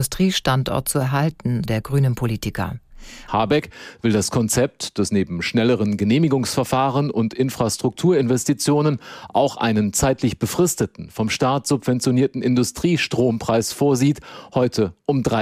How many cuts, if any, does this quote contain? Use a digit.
2